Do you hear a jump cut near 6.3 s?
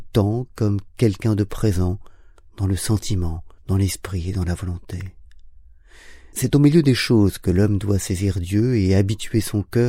yes; 2 cuts; at 3.6 s, 6.3 s

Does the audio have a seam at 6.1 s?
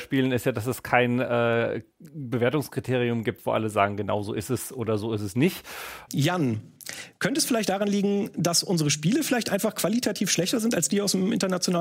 yes; 1 cut; at 6.1 s

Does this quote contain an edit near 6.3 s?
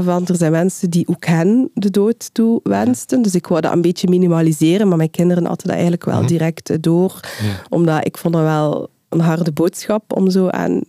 no; 1 cut; at 7.7 s

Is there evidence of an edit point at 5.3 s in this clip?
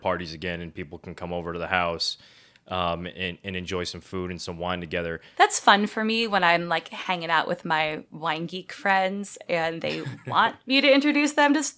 yes; 1 cut; at 5.3 s

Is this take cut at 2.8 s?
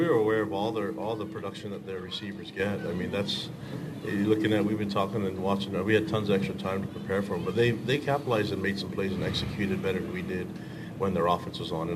no; 0 cuts

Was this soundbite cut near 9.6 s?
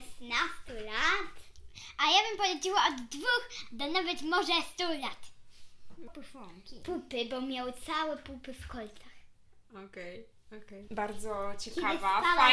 no; 2 cuts; at 6.1 s, 10.9 s

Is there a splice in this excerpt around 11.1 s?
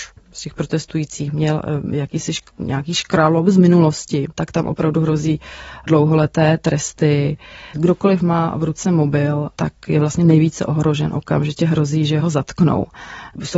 no; 1 cut; at 7.7 s

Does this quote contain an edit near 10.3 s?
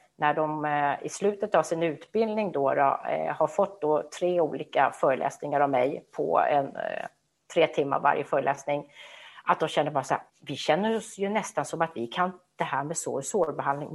yes; 1 cut; at 10.3 s

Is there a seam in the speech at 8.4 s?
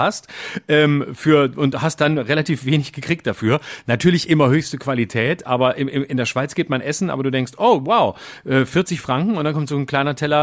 no; 0 cuts

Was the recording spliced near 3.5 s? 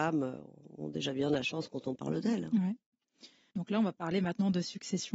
yes; 1 cut; at 3.5 s

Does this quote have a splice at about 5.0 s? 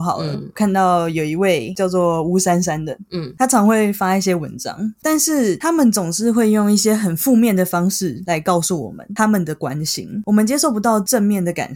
yes; 1 cut; at 5.0 s

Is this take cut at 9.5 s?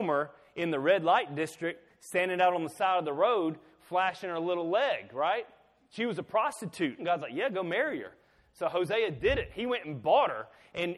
no; 1 cut; at 7.0 s

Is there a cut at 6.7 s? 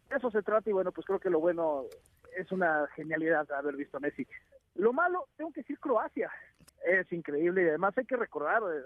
yes; 1 cut; at 6.7 s

